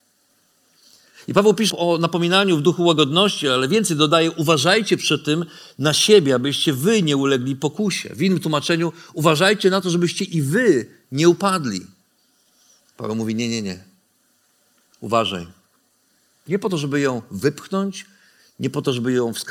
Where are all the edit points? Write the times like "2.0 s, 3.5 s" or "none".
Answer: 1.7 s, 12.8 s, 16.5 s